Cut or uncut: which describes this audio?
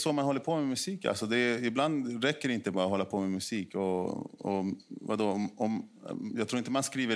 uncut